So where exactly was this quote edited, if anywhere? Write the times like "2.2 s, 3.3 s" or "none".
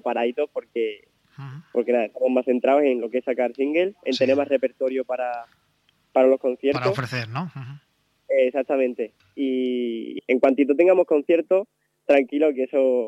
10.2 s